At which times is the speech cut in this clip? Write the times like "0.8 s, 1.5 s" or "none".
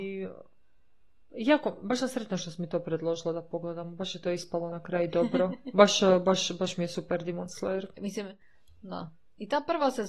8.0 s